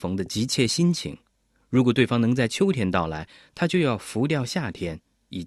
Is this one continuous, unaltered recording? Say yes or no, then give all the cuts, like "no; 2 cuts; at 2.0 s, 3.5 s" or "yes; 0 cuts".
yes; 0 cuts